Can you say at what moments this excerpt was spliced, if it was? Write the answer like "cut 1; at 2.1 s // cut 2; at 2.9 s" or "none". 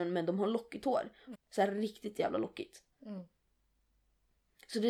cut 1; at 1.3 s